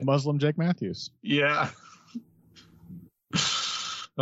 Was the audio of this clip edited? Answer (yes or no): no